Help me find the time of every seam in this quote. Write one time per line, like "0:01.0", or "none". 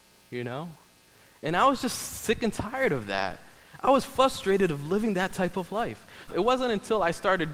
0:06.3

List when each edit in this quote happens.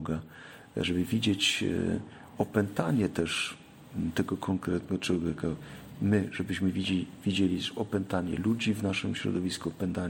none

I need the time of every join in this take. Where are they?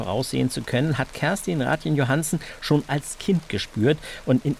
none

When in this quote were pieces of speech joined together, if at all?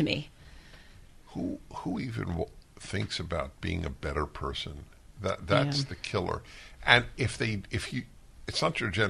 none

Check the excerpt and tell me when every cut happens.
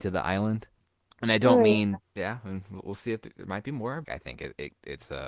0:02.0
0:04.0

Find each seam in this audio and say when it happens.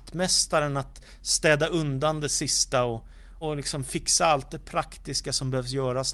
0:03.4

